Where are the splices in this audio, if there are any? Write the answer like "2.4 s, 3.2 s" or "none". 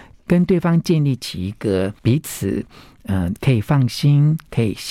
2.0 s